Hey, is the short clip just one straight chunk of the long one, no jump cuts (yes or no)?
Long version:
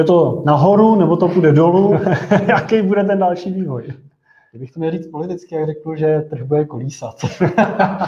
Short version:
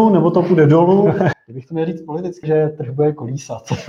no